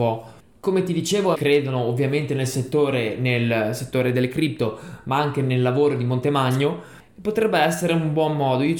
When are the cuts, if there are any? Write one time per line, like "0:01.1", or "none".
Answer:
0:01.3